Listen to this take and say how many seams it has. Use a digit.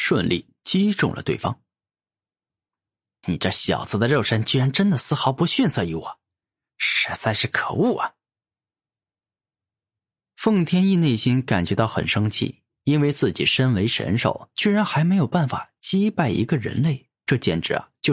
1